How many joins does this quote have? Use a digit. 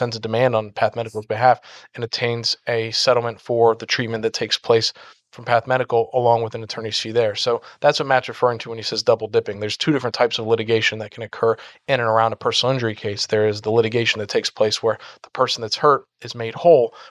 0